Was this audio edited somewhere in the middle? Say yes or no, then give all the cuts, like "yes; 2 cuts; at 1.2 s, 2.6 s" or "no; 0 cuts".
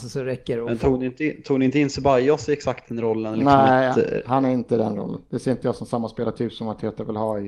no; 0 cuts